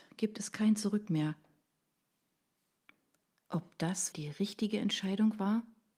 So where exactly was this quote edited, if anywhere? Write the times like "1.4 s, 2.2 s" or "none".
4.1 s